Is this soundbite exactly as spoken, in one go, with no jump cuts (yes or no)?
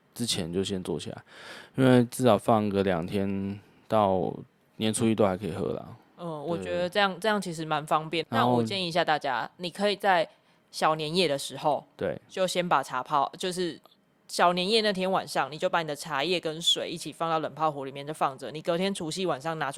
no